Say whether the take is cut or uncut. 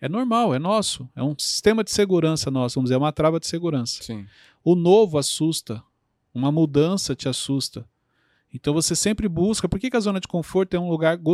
uncut